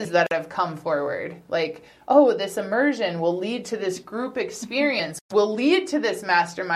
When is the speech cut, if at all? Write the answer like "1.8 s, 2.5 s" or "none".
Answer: none